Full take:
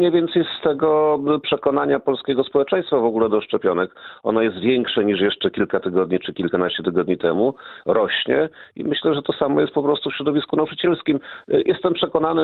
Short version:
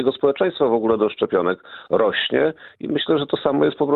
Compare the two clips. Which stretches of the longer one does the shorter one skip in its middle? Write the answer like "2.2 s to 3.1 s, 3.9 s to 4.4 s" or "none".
4.2 s to 7.8 s